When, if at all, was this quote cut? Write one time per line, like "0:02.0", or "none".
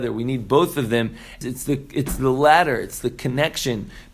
0:01.4